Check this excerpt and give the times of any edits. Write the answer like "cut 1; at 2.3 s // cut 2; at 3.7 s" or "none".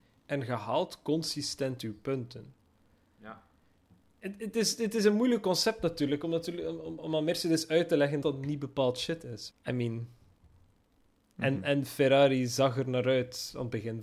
cut 1; at 8.2 s // cut 2; at 9.5 s

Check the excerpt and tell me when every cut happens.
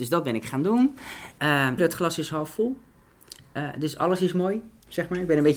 cut 1; at 1.8 s

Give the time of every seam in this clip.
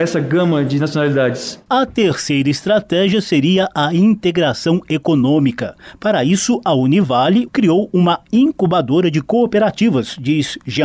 cut 1; at 7.5 s

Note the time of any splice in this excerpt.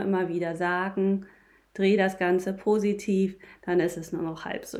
none

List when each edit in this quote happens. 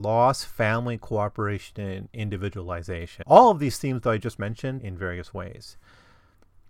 cut 1; at 3.2 s // cut 2; at 4.8 s

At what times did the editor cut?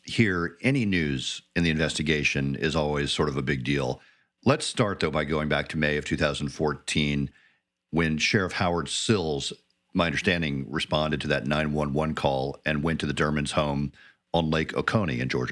none

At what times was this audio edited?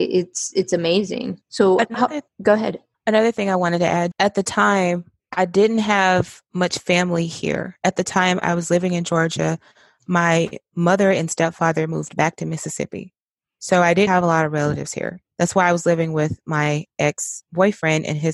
cut 1; at 4.1 s // cut 2; at 14.1 s

